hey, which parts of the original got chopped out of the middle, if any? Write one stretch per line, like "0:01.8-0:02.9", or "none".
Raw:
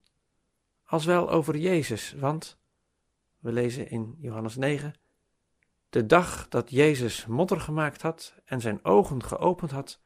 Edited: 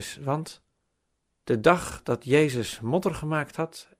0:03.2-0:05.7